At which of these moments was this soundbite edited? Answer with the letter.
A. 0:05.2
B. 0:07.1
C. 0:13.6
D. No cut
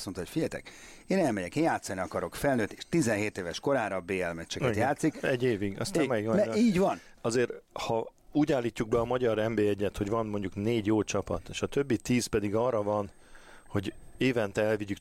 B